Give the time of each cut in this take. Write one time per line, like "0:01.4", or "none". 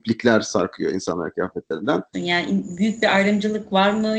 0:02.1